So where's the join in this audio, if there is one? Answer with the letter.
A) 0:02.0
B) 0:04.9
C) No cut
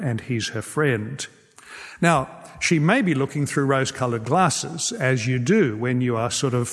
C